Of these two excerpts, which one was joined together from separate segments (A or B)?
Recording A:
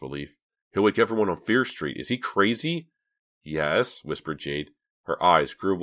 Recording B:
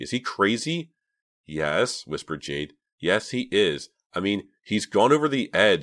A